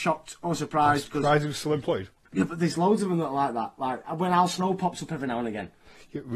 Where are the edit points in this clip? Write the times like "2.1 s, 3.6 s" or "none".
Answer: none